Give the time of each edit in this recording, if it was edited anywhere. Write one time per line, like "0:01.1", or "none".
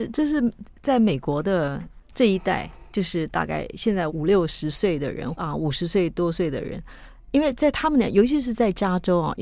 0:04.1
0:05.3